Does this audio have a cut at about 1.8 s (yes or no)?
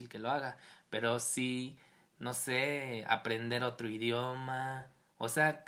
no